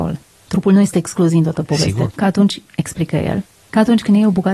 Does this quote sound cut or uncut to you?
cut